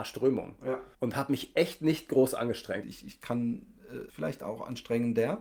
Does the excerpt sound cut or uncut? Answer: cut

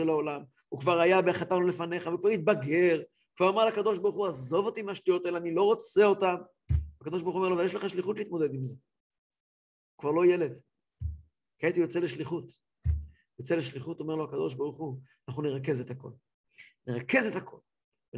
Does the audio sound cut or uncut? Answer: uncut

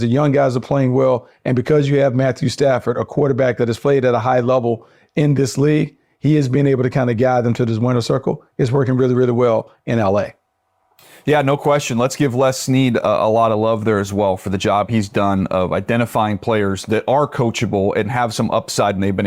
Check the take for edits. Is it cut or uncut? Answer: uncut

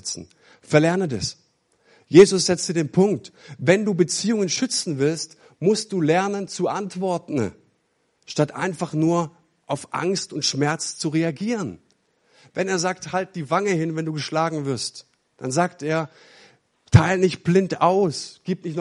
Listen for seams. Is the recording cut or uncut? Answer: uncut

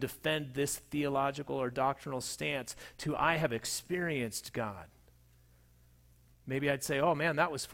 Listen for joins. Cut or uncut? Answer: cut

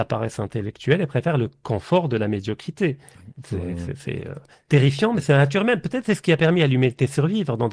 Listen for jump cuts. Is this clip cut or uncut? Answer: cut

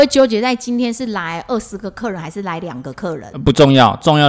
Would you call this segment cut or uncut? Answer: uncut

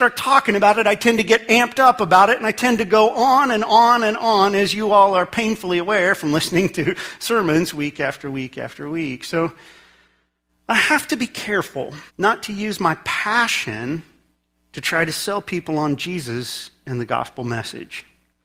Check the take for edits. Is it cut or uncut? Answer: cut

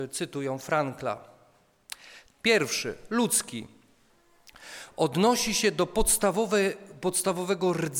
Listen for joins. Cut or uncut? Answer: cut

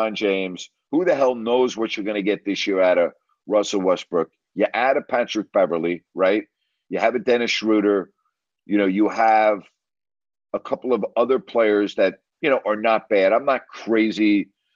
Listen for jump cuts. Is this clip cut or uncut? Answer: uncut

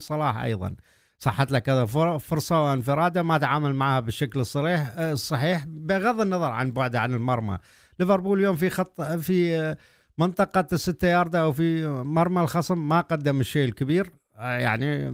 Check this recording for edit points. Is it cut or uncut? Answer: uncut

